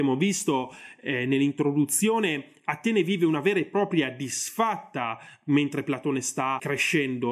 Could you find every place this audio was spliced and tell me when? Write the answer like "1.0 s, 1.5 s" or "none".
none